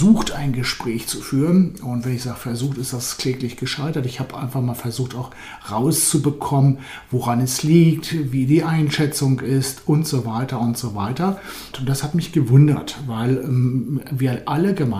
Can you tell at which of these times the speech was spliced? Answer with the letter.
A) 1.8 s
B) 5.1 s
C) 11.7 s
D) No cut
C